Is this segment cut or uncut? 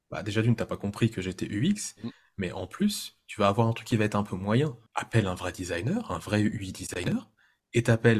cut